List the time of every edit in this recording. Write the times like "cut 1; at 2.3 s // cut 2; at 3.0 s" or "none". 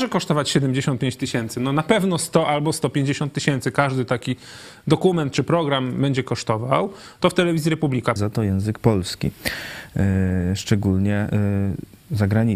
cut 1; at 8.2 s